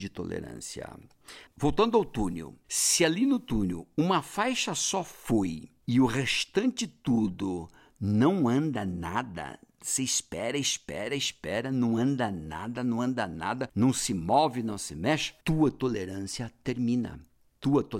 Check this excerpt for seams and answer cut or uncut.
cut